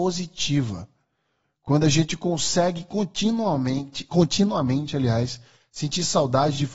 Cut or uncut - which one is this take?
uncut